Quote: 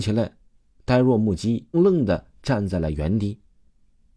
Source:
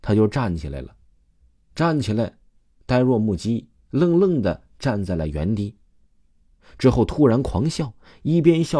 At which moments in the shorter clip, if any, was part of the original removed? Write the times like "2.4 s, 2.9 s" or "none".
1.7 s